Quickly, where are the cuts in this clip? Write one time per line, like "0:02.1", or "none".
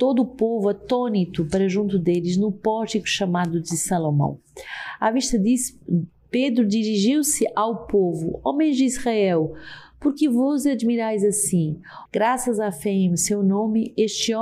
0:12.1